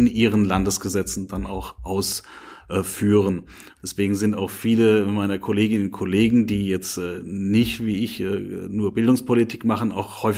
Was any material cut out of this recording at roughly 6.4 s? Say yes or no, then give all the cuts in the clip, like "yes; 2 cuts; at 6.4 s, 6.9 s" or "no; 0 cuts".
no; 1 cut; at 3.8 s